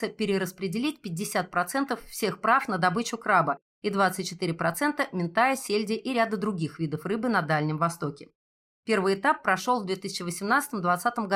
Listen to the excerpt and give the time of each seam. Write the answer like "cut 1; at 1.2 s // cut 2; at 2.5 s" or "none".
none